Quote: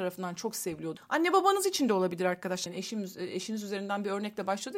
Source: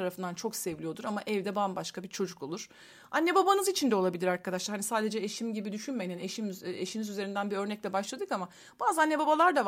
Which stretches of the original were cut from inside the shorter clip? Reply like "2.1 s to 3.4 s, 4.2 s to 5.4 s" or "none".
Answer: 1.0 s to 3.0 s, 4.7 s to 6.1 s